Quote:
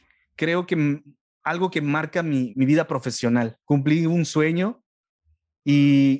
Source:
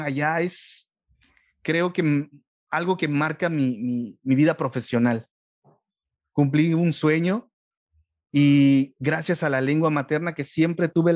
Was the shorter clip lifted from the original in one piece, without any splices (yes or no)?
no